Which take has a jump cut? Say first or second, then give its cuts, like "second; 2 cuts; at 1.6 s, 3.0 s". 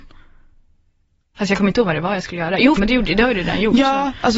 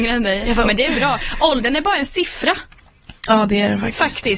first; 1 cut; at 2.8 s